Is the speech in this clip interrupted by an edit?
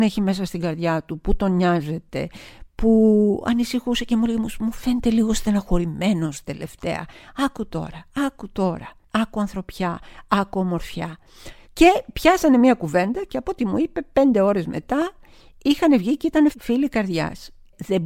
yes; 2 cuts; at 11.6 s, 16.5 s

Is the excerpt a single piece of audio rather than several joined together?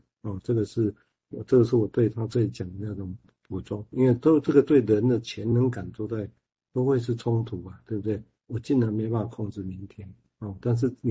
yes; 0 cuts

